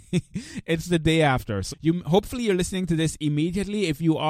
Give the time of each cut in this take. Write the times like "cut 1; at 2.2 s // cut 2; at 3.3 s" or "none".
cut 1; at 1.7 s